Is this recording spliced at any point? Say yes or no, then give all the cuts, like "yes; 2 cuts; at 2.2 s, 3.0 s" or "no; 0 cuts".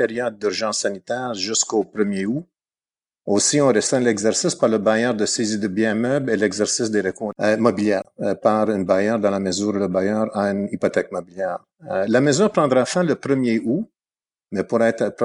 no; 0 cuts